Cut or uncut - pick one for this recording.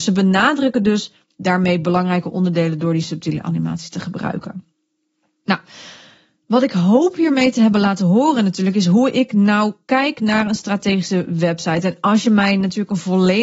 uncut